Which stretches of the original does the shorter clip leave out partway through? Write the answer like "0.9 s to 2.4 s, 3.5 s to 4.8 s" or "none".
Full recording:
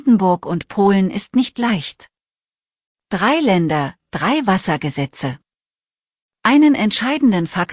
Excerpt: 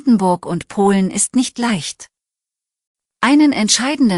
3.1 s to 6.3 s